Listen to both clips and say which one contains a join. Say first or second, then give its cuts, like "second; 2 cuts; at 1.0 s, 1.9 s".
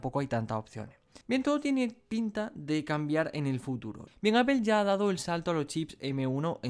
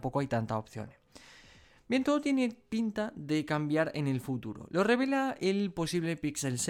first; 2 cuts; at 1.2 s, 4.1 s